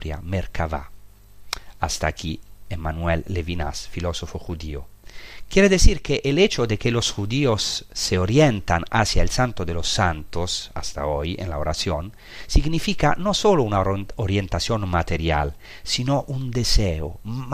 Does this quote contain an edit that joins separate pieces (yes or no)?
yes